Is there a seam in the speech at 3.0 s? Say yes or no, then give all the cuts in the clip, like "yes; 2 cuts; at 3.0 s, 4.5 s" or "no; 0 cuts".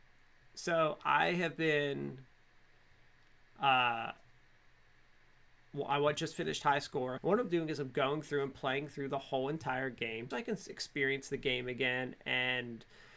no; 2 cuts; at 7.2 s, 10.3 s